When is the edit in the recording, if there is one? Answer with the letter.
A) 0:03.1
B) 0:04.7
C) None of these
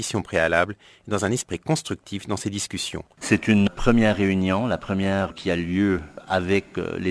A